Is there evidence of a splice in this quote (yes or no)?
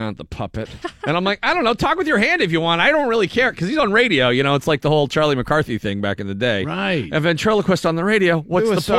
no